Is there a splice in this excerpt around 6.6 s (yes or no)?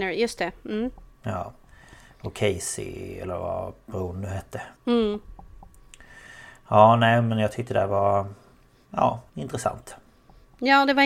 no